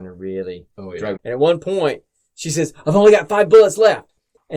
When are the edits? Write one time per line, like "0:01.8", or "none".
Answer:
0:01.2